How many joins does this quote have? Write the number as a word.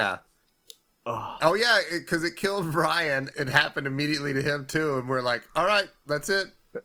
one